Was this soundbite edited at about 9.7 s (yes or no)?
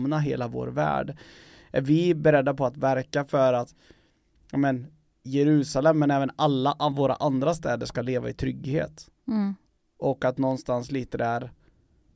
no